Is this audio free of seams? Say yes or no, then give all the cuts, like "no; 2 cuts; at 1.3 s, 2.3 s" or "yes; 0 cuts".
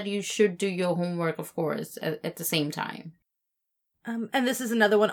yes; 0 cuts